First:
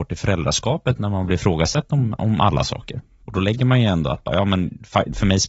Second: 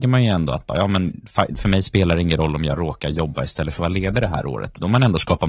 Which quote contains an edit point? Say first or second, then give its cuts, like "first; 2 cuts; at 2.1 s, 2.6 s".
first; 1 cut; at 3.2 s